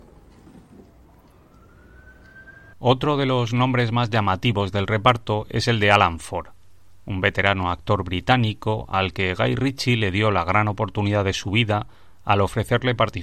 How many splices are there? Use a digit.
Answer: 1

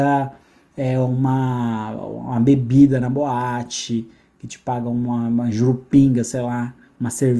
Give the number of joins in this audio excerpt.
0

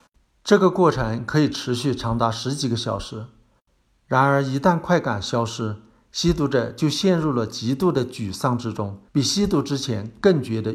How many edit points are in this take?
1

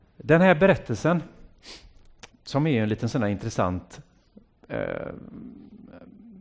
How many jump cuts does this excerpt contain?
1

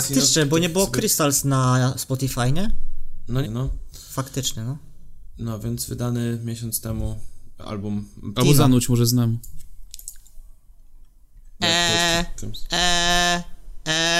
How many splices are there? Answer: 3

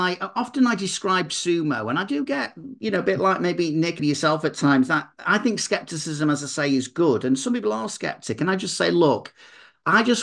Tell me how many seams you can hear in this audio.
1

